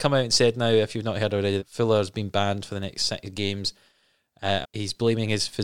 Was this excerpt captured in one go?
no; 2 cuts; at 1.6 s, 4.6 s

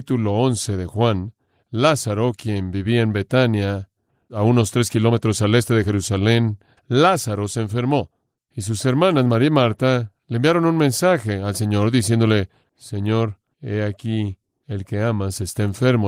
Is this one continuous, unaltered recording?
no; 2 cuts; at 6.8 s, 8.4 s

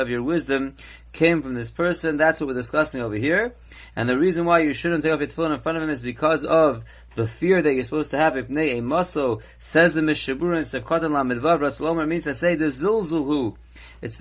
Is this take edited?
no; 0 cuts

